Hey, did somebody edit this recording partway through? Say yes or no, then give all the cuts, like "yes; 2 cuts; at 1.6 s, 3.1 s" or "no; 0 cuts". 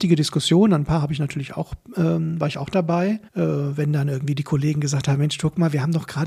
yes; 1 cut; at 3.3 s